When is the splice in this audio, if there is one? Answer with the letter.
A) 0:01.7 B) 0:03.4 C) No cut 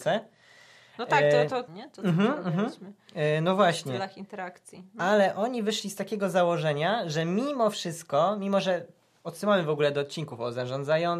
A